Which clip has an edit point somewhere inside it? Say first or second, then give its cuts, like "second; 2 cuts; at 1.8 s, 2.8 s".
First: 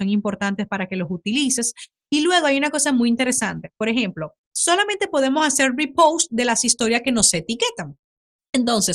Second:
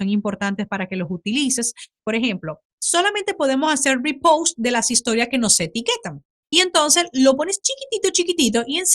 second; 2 cuts; at 2.0 s, 6.4 s